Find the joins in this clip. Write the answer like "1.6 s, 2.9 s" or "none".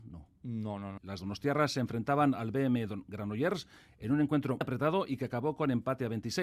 1.0 s, 4.6 s